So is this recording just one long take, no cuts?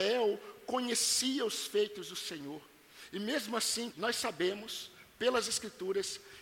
no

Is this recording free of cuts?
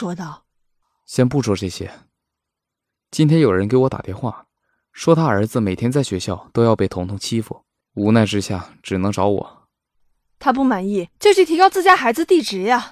no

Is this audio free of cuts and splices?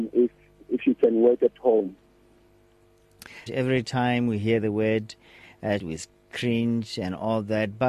no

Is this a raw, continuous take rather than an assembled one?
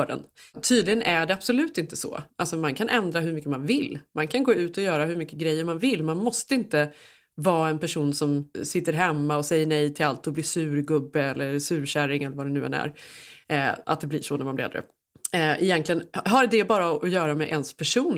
no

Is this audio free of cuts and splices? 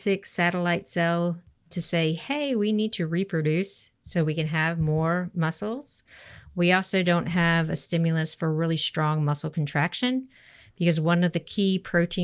yes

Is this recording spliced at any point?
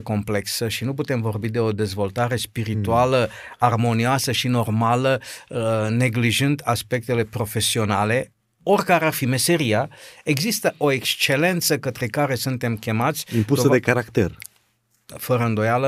no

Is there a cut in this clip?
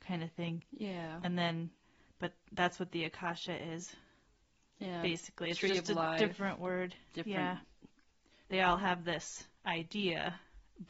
yes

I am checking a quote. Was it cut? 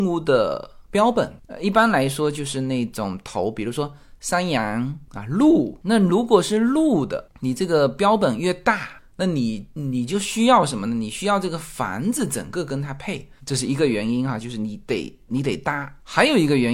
yes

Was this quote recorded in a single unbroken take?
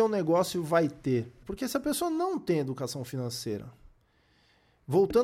no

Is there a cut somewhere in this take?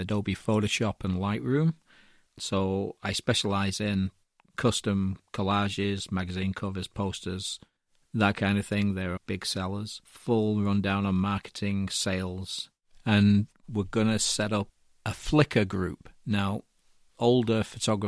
yes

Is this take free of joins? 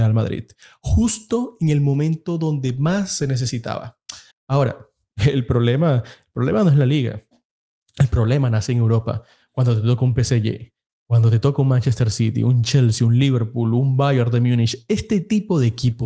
no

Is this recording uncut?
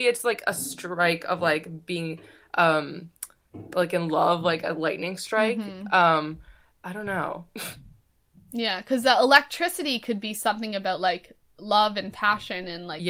yes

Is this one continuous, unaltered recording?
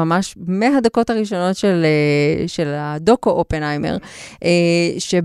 yes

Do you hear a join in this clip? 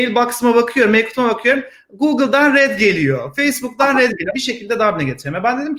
yes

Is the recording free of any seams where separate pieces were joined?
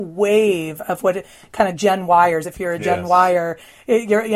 yes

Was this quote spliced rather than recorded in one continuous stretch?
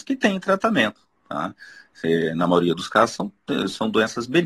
no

